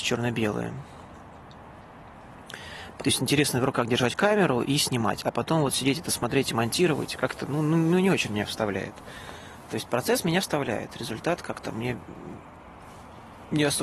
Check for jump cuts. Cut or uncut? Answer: cut